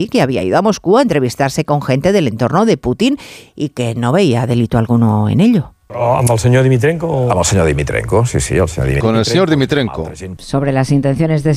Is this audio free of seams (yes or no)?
no